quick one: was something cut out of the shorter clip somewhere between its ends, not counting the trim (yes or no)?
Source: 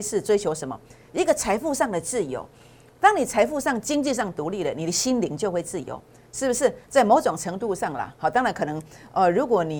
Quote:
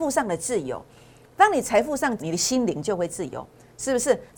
yes